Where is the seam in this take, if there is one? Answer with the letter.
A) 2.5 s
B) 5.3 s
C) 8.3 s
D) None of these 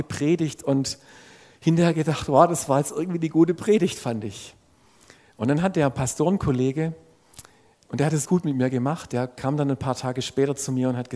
C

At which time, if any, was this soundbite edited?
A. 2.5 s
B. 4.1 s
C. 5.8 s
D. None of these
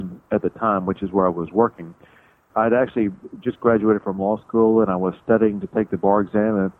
A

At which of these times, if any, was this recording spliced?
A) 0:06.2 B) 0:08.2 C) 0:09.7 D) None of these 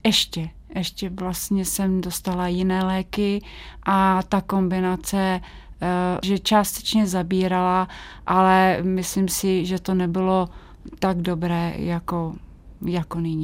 A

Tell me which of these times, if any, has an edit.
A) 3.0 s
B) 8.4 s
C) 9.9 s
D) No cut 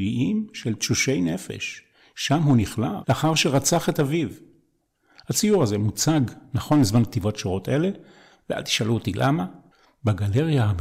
A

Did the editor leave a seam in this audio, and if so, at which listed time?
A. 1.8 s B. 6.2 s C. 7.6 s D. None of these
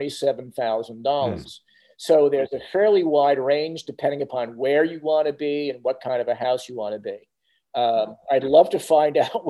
D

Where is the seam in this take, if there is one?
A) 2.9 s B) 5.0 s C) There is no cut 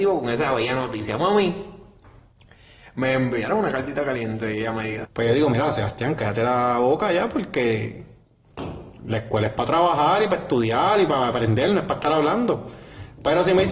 B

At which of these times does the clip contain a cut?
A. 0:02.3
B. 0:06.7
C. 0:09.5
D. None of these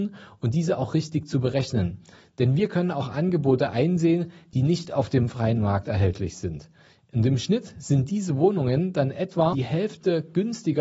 C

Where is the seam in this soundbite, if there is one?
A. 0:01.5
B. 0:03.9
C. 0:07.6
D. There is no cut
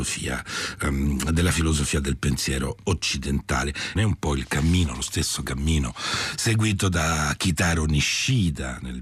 B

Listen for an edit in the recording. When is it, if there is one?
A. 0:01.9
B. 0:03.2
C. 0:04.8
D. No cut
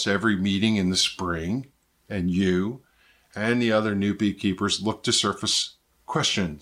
A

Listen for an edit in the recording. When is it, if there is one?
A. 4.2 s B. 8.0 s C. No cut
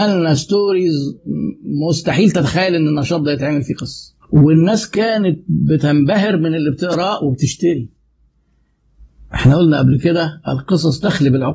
A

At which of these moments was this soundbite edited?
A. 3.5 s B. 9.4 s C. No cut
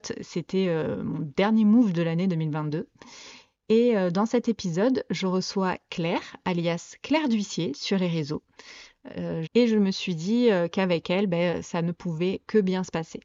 B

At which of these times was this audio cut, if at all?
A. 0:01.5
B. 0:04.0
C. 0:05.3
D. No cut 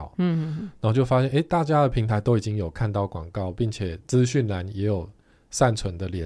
B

